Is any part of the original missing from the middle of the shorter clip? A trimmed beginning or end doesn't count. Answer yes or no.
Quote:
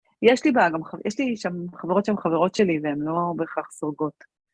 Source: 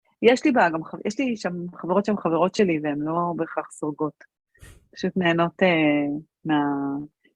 no